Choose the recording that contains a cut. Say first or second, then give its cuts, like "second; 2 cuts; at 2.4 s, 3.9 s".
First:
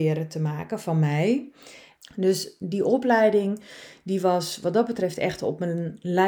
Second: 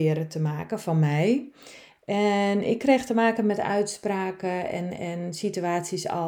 first; 1 cut; at 2.0 s